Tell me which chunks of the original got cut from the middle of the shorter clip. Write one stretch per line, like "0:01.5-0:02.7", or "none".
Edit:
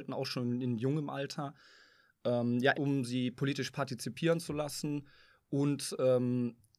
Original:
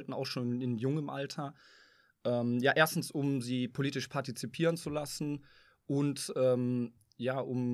0:02.7-0:03.1